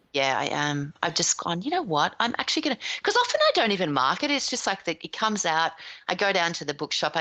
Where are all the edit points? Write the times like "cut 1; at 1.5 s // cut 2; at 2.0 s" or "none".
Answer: none